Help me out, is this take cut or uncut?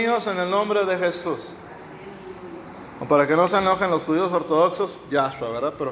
uncut